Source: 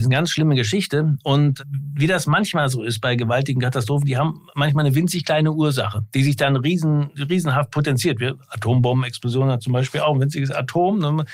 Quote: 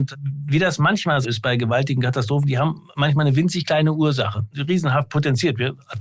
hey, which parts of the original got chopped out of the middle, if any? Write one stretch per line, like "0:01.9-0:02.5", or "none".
0:02.7-0:02.8
0:06.1-0:07.1